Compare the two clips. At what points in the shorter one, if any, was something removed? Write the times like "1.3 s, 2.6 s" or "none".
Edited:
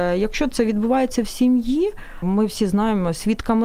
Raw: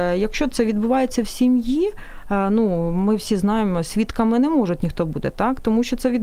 2.2 s